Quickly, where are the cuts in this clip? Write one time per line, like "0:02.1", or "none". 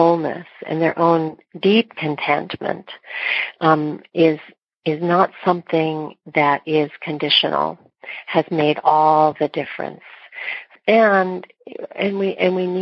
0:10.8